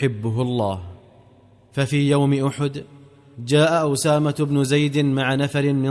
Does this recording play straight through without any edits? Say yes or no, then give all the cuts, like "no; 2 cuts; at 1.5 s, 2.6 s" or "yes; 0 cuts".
yes; 0 cuts